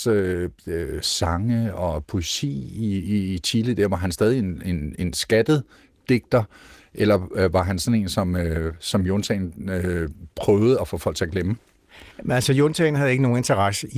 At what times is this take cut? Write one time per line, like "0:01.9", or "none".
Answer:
0:12.1